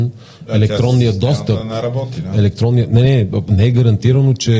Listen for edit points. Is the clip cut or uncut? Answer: uncut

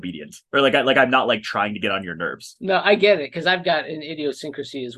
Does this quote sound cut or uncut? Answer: uncut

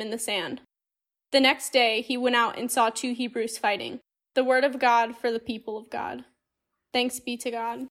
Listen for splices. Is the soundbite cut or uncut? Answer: cut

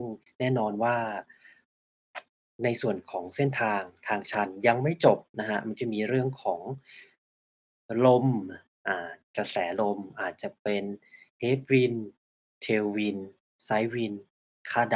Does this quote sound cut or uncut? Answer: uncut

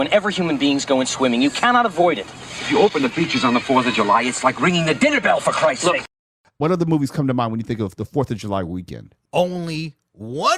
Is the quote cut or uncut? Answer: uncut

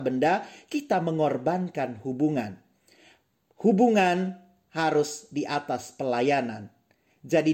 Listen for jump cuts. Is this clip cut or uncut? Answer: uncut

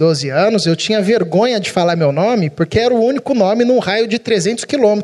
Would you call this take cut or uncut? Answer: uncut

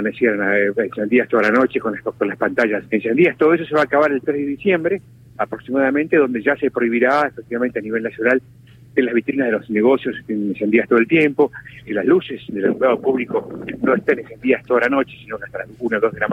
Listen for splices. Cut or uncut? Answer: cut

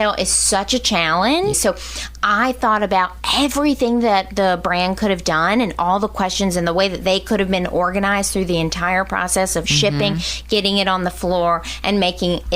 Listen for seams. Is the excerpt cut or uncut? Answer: cut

